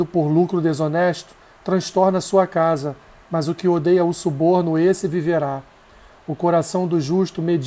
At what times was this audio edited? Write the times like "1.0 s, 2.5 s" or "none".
none